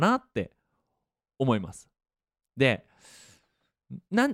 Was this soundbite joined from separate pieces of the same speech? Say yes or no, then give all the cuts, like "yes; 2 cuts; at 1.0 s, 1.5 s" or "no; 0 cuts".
no; 0 cuts